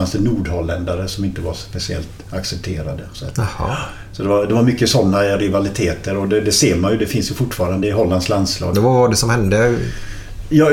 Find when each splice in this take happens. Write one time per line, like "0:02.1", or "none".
0:08.7